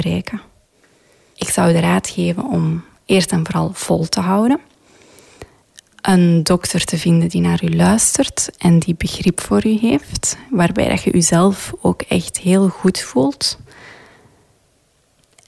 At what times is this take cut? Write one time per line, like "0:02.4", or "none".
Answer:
none